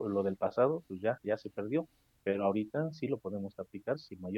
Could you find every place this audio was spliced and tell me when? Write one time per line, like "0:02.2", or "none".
none

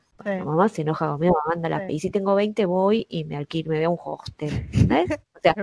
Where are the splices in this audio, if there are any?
0:01.9

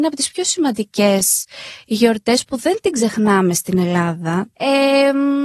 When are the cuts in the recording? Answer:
0:04.5

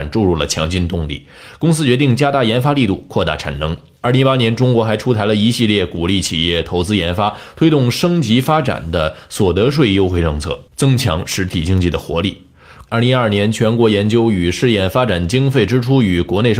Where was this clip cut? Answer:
0:10.7
0:12.9

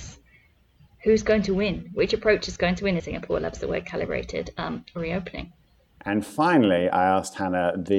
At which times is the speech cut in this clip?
0:03.0

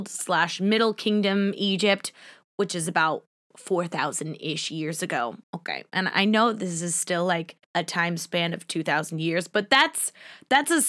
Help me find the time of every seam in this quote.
0:05.4
0:07.6

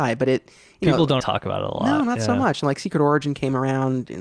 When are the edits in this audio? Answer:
0:01.2

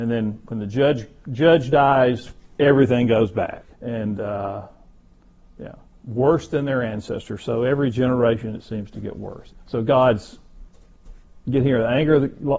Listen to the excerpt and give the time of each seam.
0:03.7
0:09.5

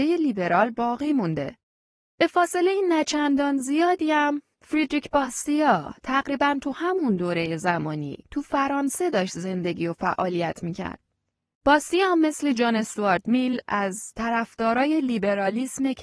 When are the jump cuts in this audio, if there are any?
0:02.0
0:11.5

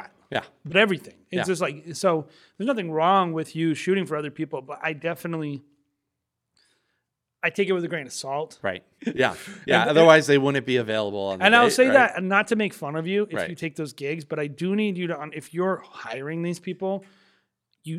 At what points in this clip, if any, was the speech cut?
0:09.0

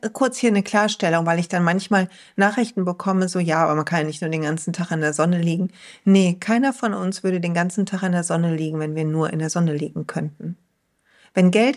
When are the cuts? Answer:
none

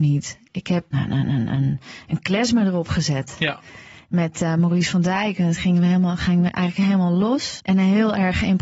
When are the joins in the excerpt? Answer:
0:00.9
0:07.6

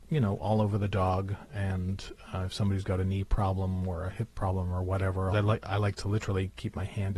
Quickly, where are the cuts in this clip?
0:05.3

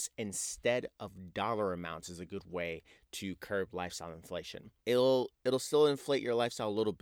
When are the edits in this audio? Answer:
0:04.8

